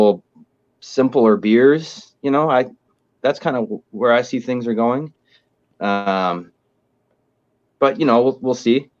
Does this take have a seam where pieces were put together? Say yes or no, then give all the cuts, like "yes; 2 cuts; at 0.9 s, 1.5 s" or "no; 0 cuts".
no; 0 cuts